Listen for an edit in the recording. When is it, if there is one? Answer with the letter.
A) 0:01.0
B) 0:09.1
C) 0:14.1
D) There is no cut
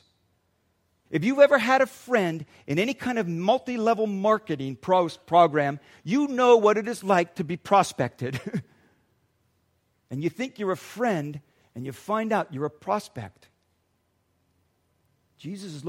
A